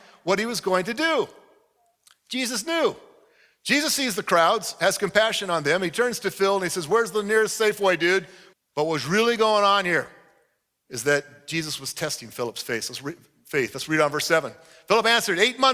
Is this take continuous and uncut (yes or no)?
no